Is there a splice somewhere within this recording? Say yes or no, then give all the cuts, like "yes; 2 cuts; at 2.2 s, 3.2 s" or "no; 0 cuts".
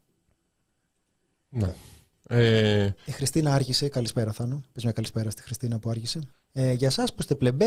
yes; 1 cut; at 6.3 s